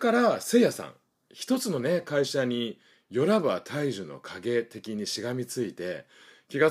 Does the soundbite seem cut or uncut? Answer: uncut